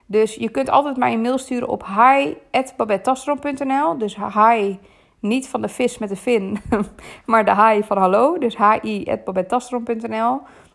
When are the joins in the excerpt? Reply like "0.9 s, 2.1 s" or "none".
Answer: none